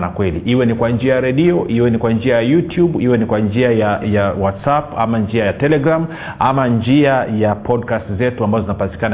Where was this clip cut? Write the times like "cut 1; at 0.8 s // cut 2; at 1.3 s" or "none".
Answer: cut 1; at 4.0 s